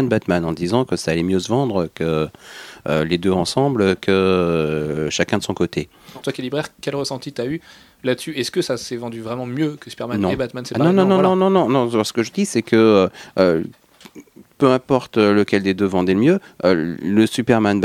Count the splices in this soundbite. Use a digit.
1